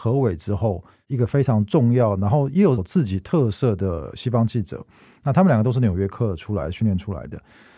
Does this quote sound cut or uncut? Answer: cut